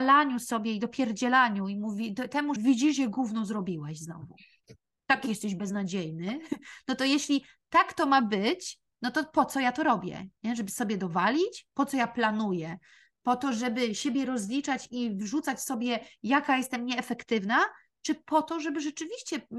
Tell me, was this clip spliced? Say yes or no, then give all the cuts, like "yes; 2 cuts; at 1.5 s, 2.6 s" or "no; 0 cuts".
yes; 1 cut; at 2.6 s